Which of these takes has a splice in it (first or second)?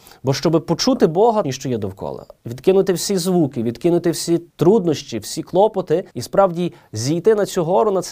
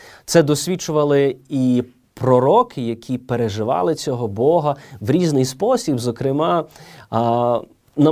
first